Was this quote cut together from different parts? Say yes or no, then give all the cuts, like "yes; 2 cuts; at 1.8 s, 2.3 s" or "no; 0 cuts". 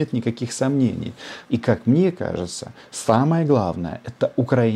yes; 1 cut; at 1.4 s